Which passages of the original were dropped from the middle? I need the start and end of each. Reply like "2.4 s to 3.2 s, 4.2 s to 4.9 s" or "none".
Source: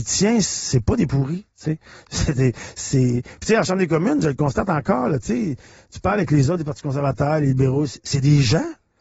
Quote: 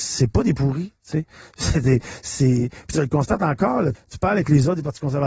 3.5 s to 4.2 s, 5.2 s to 5.8 s